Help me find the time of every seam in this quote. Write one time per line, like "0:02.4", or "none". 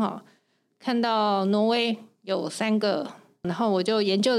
0:03.4